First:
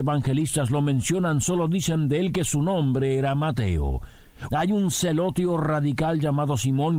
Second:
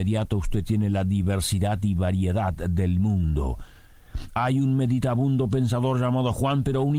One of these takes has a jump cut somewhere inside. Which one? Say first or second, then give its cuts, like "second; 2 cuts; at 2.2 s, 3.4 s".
first; 1 cut; at 4.5 s